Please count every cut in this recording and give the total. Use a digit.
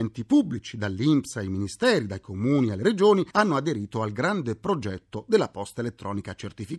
0